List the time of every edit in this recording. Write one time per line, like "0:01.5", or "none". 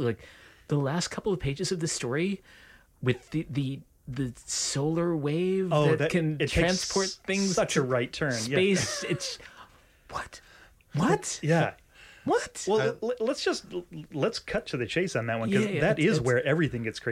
none